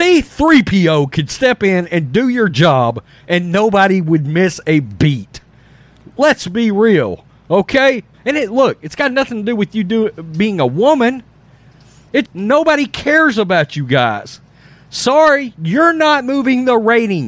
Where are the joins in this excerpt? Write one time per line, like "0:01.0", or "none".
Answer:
0:08.1
0:12.3